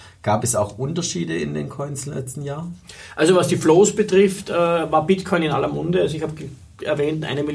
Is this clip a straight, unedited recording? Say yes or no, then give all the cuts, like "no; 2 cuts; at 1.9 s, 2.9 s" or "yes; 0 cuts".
yes; 0 cuts